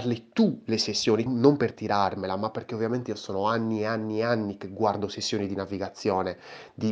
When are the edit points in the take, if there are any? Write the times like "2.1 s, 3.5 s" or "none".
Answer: 1.3 s